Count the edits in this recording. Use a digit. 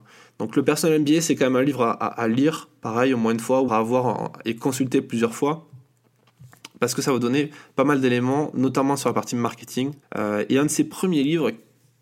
2